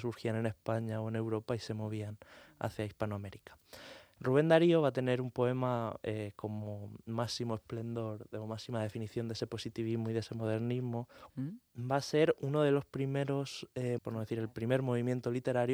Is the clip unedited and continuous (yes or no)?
no